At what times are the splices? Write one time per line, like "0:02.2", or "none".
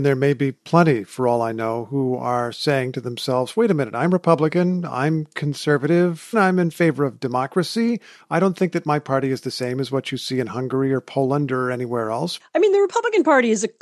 0:06.3
0:12.4

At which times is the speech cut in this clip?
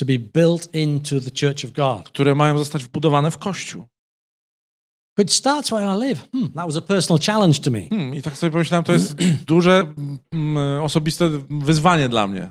none

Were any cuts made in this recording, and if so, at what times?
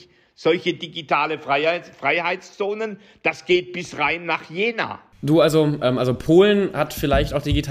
none

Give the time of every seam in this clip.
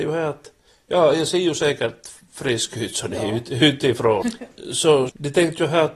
0:04.2

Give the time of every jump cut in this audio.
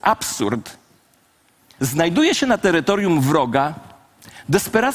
0:01.8

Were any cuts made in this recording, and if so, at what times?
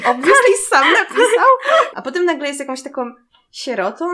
0:01.9

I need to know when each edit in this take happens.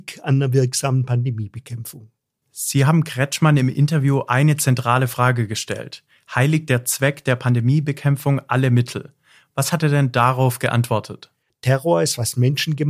0:11.5

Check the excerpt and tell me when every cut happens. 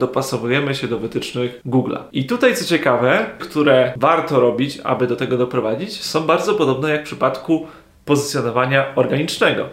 0:02.1
0:03.4

